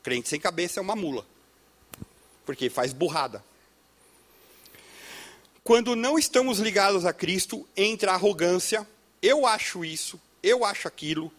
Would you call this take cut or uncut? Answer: cut